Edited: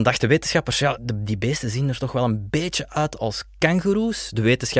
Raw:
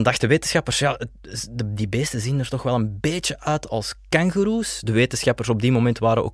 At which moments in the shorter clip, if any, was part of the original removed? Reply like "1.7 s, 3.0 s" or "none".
1.0 s